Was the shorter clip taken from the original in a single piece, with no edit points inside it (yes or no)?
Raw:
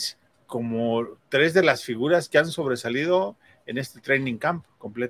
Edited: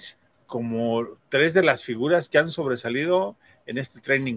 yes